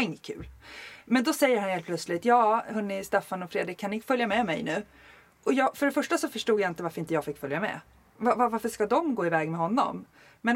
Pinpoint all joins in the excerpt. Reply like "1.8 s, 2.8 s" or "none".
none